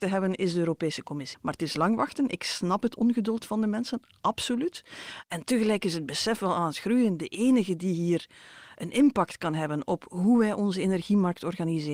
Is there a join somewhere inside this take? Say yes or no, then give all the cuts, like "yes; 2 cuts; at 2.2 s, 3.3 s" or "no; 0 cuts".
yes; 1 cut; at 1.3 s